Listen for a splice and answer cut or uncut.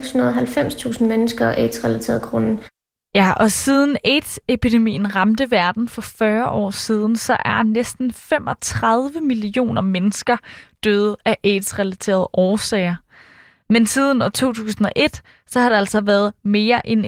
uncut